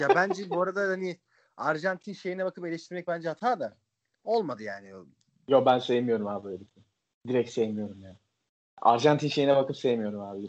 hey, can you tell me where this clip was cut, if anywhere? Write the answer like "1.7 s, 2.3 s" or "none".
none

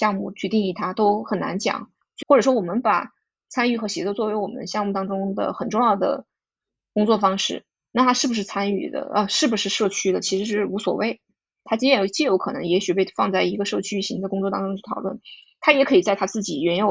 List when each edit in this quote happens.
2.2 s, 11.7 s

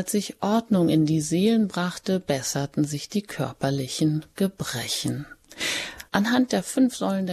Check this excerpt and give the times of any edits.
6.1 s

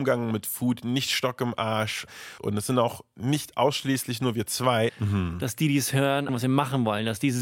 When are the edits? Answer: 2.4 s, 4.9 s, 6.3 s

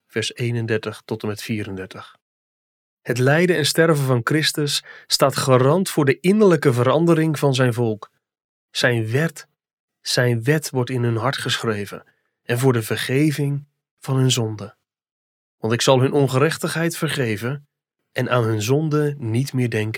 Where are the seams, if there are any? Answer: 15.5 s

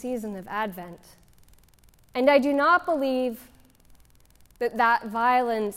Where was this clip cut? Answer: 2.0 s

